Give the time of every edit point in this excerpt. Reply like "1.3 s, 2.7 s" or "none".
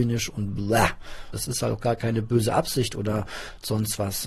1.3 s